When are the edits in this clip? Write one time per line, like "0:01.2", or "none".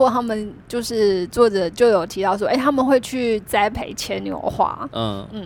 0:01.7